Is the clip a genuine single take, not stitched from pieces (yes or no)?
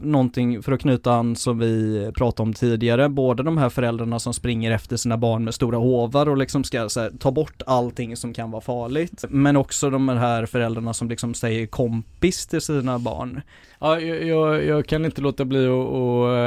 no